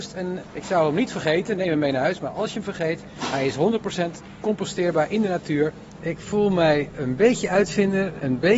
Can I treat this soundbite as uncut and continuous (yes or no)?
no